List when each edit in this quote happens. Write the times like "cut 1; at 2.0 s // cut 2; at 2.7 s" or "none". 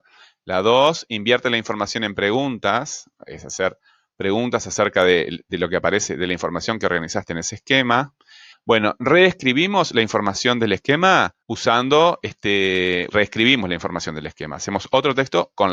cut 1; at 8.5 s // cut 2; at 11.4 s // cut 3; at 13.1 s